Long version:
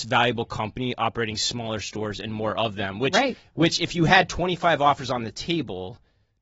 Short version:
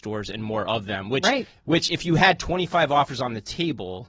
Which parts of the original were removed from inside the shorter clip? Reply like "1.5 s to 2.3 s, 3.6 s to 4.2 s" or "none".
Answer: none